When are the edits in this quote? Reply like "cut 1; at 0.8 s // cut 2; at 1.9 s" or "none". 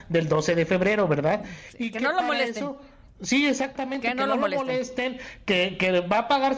none

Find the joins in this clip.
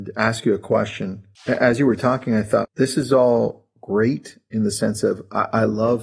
cut 1; at 1.4 s // cut 2; at 2.6 s

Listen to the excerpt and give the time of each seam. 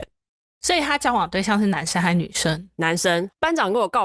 none

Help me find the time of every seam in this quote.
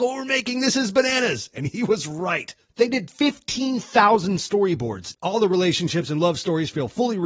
cut 1; at 2.7 s // cut 2; at 5.2 s

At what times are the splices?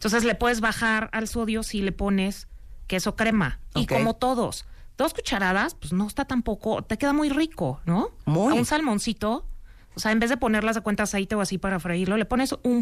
none

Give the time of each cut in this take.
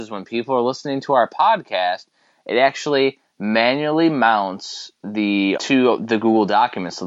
cut 1; at 5.5 s

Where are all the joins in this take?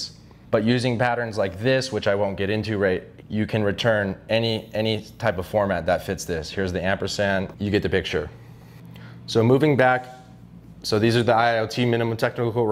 cut 1; at 3.2 s // cut 2; at 7.5 s

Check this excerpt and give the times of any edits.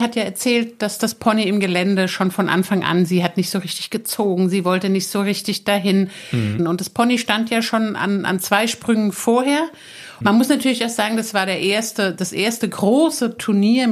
cut 1; at 6.6 s // cut 2; at 10.2 s

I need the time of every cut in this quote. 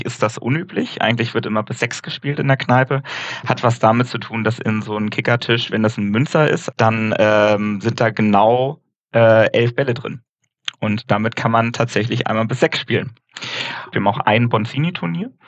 cut 1; at 6.7 s // cut 2; at 13.9 s

